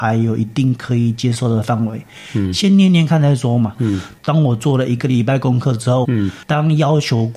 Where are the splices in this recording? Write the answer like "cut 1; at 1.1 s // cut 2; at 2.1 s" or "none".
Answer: cut 1; at 3.7 s // cut 2; at 6.0 s